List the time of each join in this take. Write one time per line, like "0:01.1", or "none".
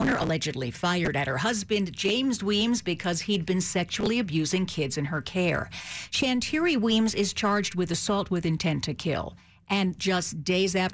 none